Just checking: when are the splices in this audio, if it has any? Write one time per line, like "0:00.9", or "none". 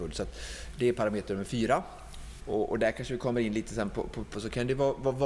0:02.4
0:04.3